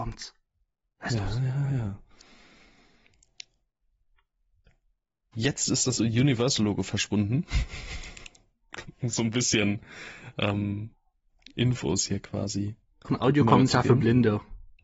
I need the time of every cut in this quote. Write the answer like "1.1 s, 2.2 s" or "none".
13.0 s